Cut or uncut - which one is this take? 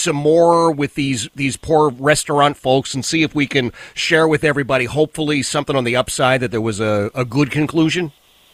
uncut